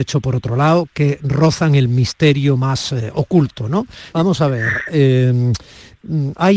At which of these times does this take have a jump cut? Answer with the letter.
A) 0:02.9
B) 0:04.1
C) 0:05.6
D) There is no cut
B